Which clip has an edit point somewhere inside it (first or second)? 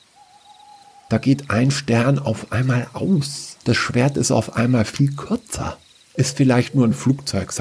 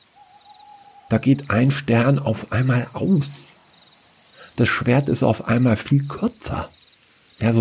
first